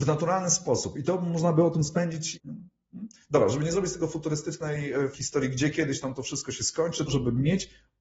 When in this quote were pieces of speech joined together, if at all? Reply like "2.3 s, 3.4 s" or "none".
2.3 s, 5.1 s, 7.1 s